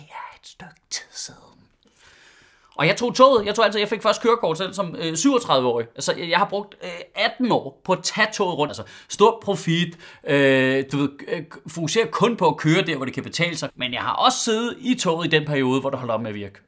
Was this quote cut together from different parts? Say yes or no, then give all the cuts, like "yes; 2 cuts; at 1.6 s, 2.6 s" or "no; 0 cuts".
yes; 2 cuts; at 8.7 s, 13.7 s